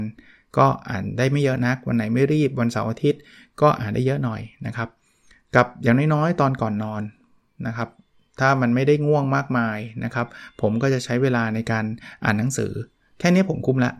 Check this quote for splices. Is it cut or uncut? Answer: uncut